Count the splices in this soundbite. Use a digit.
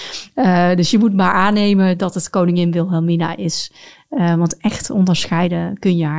0